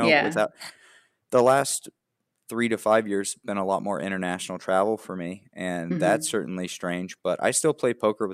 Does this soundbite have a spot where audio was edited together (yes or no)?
no